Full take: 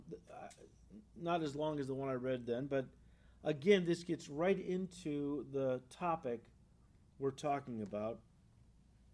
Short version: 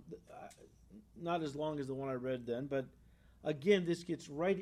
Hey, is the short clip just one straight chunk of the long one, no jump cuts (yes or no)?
yes